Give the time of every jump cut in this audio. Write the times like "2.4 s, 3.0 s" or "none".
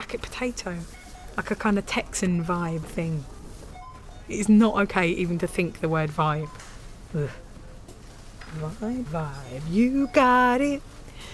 9.1 s